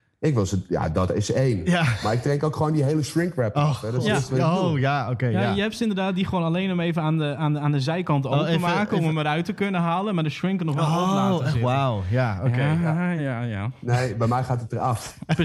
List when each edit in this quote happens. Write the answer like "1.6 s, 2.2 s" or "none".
13.2 s